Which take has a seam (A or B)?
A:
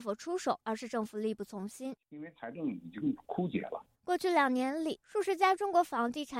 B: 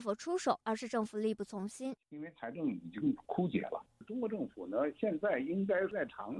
A